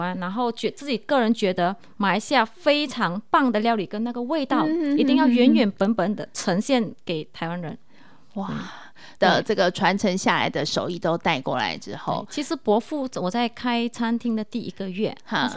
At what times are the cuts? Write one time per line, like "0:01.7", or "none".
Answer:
0:09.2